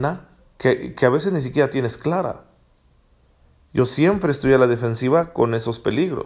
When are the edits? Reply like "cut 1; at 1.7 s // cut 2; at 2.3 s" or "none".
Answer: none